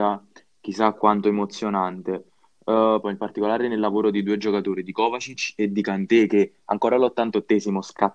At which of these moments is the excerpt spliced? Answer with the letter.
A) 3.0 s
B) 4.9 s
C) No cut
A